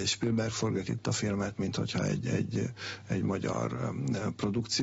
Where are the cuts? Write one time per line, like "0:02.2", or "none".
none